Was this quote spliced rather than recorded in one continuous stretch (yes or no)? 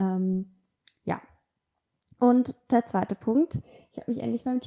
no